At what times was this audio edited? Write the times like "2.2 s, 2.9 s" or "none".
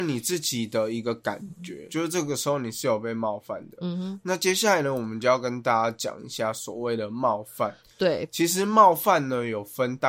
none

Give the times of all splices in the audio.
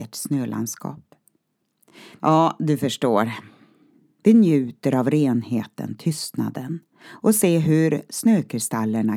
2.2 s, 4.2 s

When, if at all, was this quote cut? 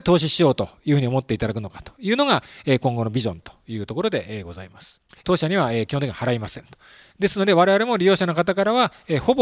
5.2 s

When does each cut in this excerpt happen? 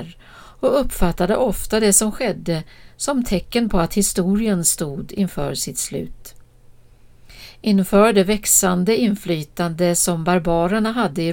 none

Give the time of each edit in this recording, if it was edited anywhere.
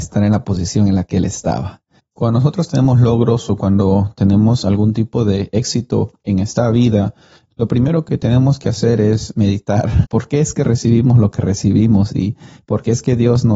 7.5 s, 10.0 s

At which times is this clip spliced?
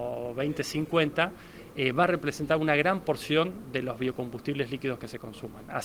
none

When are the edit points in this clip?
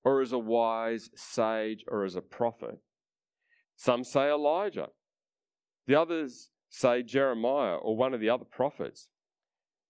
3.6 s

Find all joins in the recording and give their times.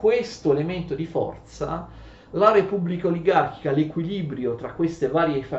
none

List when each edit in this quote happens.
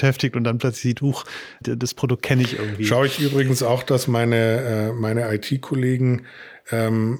1.6 s

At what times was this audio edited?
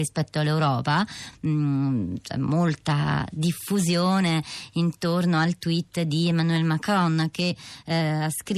none

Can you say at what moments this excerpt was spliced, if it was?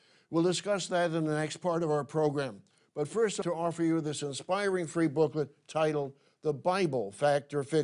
3.4 s

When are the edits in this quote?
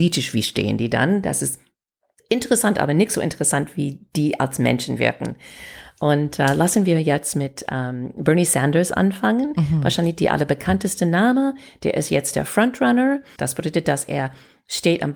13.4 s

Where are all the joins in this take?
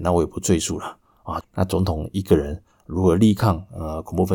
1.4 s

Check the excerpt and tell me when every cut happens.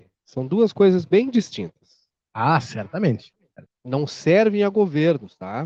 3.6 s

